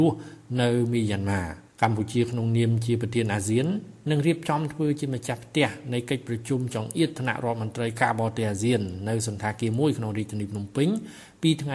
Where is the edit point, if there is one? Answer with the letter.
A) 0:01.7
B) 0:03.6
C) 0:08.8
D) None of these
A